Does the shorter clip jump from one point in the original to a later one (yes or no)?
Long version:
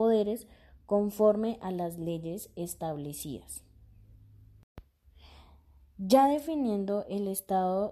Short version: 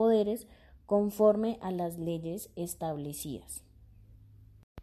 no